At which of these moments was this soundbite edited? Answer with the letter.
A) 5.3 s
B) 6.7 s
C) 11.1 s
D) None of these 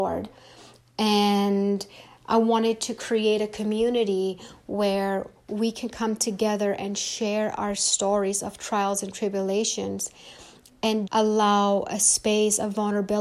C